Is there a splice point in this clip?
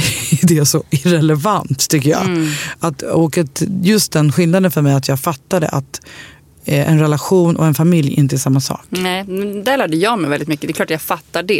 no; 0 cuts

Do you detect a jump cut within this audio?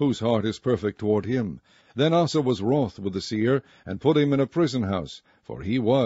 yes; 1 cut; at 1.8 s

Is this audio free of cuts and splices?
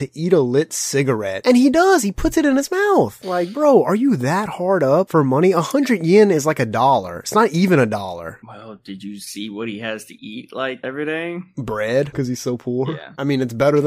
yes; 0 cuts

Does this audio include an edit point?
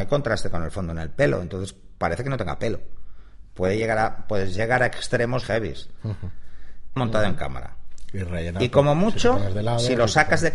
yes; 2 cuts; at 5.4 s, 7.0 s

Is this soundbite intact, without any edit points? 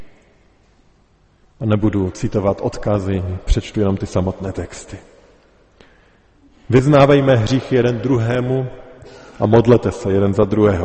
yes; 0 cuts

